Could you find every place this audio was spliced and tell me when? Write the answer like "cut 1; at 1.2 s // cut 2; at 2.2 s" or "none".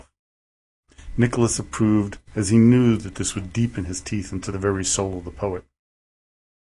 none